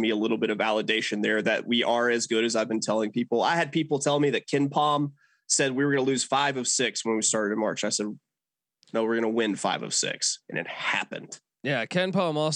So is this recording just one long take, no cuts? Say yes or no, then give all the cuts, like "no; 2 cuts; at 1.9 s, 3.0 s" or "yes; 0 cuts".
yes; 0 cuts